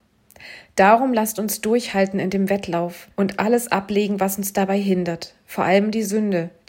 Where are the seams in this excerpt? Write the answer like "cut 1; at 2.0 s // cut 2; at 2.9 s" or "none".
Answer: cut 1; at 3.1 s

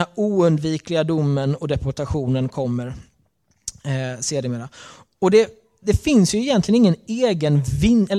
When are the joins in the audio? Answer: none

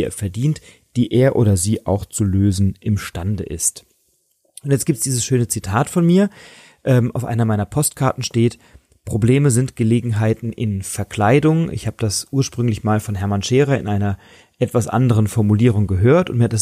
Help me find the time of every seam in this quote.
none

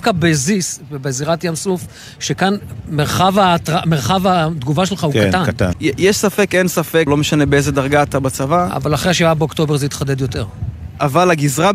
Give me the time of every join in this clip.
cut 1; at 5.7 s // cut 2; at 7.1 s

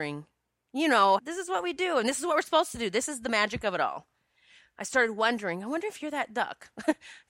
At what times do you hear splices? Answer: cut 1; at 1.2 s

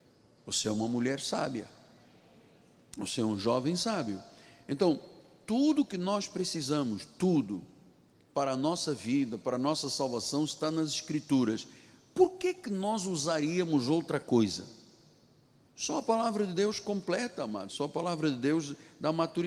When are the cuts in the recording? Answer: cut 1; at 17.7 s

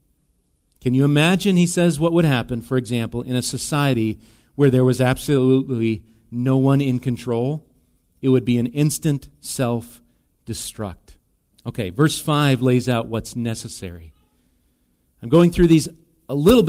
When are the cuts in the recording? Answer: cut 1; at 11.5 s

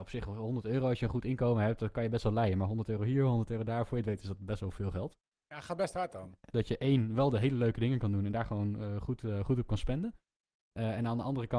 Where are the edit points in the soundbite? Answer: cut 1; at 6.5 s

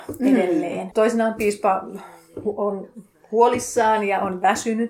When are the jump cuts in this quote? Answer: cut 1; at 0.9 s

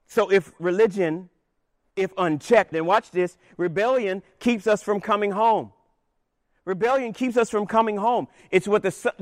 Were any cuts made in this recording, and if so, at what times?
cut 1; at 2.7 s

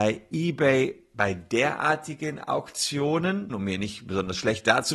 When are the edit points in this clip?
cut 1; at 3.5 s

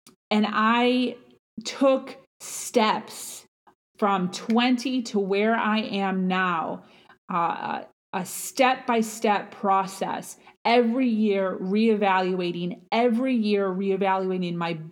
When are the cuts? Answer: none

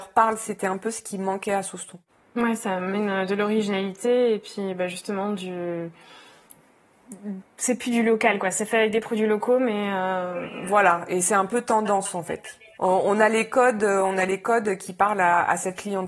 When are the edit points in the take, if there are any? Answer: none

